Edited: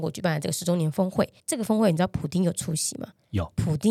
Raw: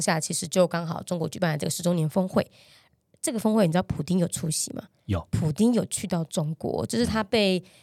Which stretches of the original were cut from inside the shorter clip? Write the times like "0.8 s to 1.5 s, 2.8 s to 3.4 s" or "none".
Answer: 2.6 s to 3.1 s